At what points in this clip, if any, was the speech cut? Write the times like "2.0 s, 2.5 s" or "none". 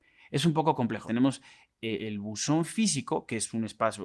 1.1 s